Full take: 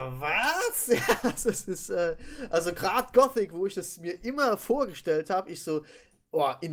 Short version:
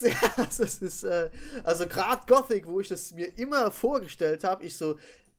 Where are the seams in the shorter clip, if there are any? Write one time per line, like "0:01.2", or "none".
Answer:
none